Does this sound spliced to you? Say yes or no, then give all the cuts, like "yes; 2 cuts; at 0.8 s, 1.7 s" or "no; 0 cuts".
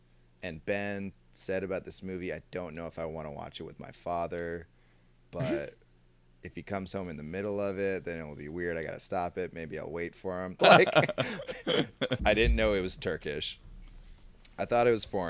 yes; 2 cuts; at 10.6 s, 12.2 s